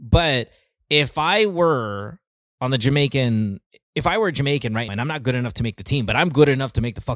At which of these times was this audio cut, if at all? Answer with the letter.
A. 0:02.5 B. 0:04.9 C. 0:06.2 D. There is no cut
B